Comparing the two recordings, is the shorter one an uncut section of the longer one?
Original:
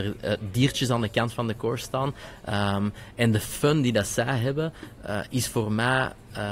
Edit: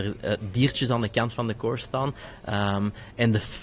yes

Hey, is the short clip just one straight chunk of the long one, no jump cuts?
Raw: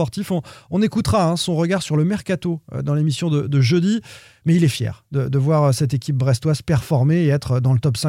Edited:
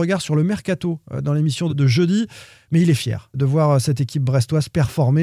no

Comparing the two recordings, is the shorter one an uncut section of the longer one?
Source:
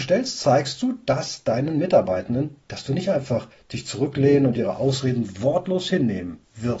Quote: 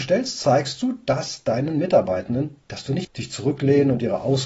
no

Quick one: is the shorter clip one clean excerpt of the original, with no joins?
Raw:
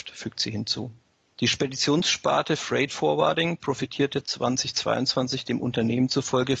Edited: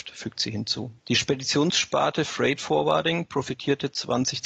no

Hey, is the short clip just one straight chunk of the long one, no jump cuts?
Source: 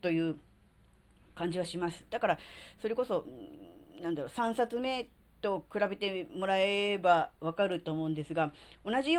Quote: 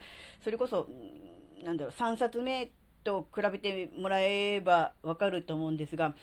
yes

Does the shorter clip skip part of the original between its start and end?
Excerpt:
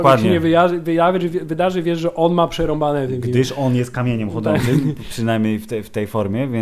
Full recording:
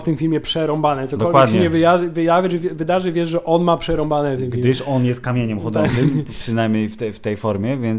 no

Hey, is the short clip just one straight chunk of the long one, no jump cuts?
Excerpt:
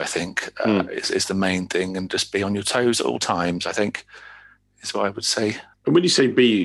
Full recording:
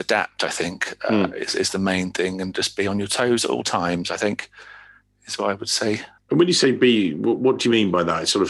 yes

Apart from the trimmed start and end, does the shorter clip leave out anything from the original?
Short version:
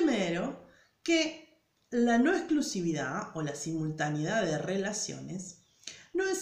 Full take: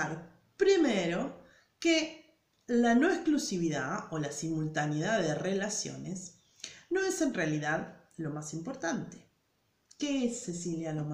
no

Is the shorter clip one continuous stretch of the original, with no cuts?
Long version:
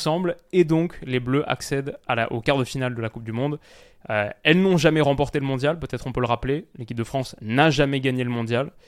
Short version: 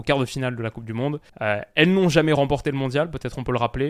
no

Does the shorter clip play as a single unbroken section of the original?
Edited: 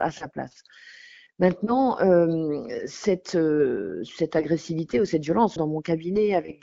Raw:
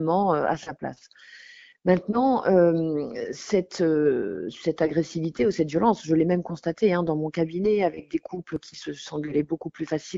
no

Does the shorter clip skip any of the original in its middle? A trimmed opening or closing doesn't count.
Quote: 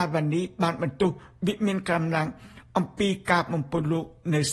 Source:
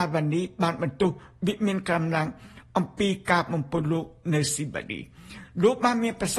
no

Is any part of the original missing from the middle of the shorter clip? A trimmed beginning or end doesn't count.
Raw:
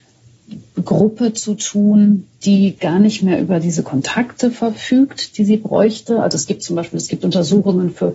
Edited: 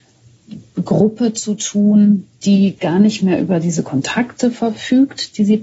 no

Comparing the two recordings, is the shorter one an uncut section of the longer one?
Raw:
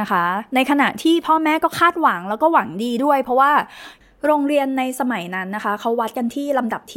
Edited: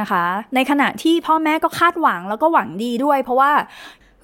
yes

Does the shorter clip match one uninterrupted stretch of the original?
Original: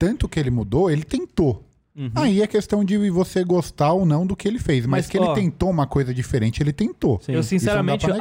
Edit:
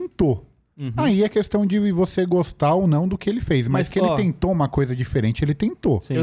yes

